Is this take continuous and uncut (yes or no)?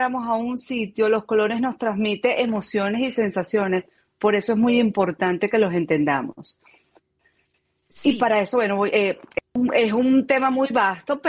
yes